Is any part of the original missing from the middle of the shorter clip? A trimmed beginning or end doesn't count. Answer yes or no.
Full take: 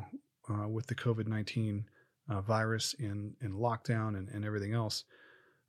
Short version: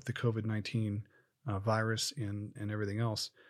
yes